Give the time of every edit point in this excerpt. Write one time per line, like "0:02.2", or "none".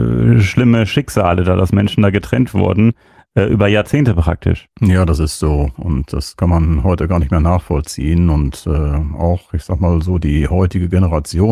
none